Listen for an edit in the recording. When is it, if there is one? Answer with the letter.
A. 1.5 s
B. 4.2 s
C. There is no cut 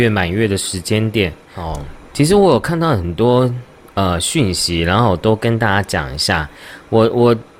A